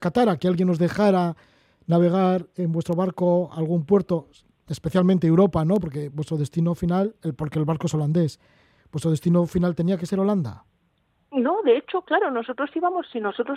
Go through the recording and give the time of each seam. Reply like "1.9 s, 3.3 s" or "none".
none